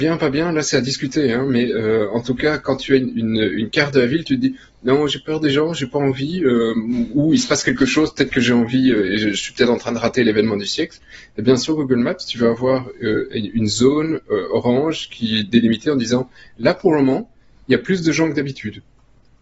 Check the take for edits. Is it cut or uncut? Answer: uncut